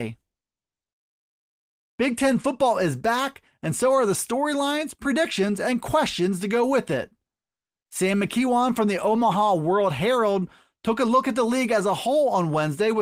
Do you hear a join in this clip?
no; 0 cuts

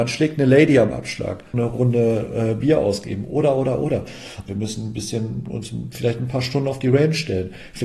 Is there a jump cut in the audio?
yes; 2 cuts; at 1.5 s, 4.5 s

